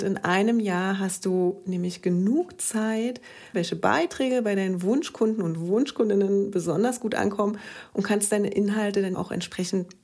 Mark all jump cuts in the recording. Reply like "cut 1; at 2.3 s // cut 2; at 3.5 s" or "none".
cut 1; at 3.5 s // cut 2; at 9.1 s